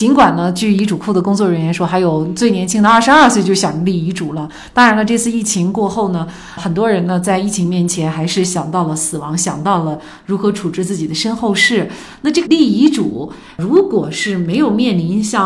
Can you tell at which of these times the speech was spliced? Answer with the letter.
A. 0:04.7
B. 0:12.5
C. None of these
B